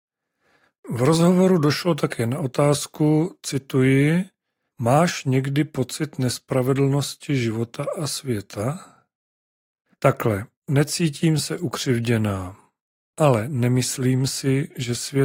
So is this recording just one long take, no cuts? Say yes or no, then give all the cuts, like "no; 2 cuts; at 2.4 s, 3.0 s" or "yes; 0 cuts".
no; 1 cut; at 9.9 s